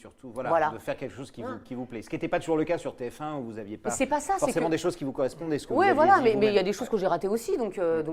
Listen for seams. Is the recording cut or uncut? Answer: uncut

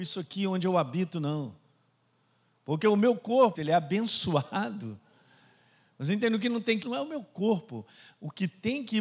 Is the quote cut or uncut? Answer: cut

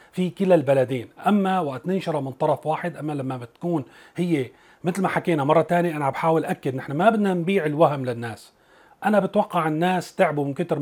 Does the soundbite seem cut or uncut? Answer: uncut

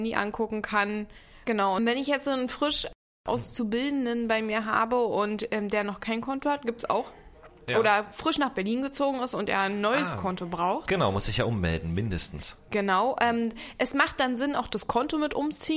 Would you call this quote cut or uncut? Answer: cut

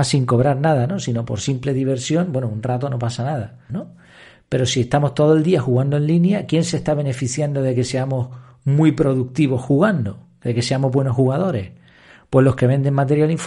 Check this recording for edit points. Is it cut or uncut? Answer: cut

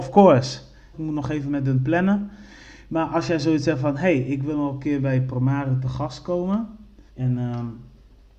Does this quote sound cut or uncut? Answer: cut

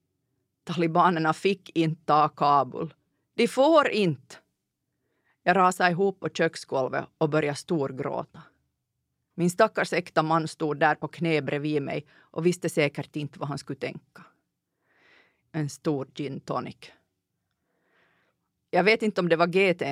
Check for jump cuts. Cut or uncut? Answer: cut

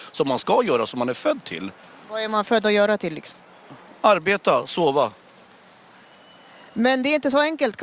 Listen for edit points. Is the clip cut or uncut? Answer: uncut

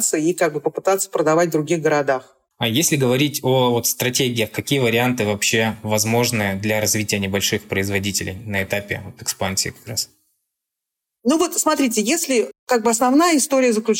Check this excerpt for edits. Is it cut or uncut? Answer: uncut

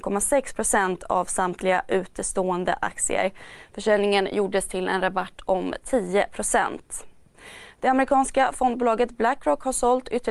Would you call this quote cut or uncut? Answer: uncut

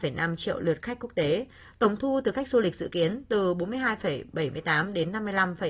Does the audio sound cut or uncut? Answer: uncut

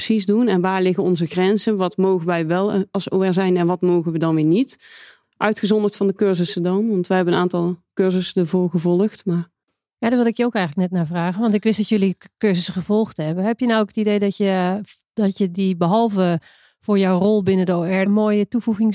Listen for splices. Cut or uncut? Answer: cut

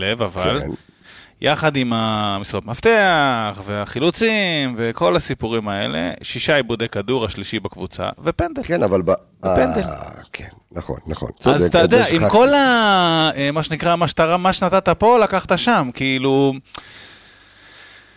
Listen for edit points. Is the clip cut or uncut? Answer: uncut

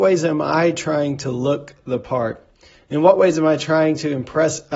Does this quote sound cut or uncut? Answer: uncut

